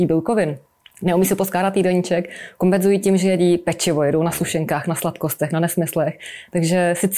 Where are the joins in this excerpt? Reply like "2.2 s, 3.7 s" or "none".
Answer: none